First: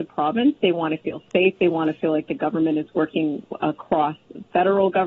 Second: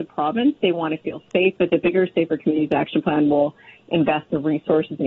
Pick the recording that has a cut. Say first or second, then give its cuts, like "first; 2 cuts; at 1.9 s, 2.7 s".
second; 1 cut; at 1.6 s